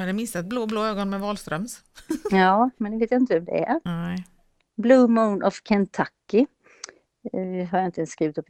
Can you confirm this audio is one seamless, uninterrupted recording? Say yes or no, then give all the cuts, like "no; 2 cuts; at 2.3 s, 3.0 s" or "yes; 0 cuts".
no; 1 cut; at 2.8 s